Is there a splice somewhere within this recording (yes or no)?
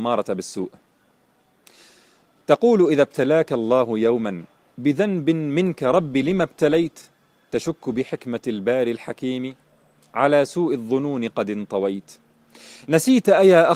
no